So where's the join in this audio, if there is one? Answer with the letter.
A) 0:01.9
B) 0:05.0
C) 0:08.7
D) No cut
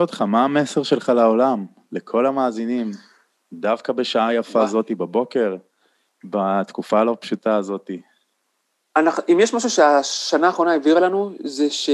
C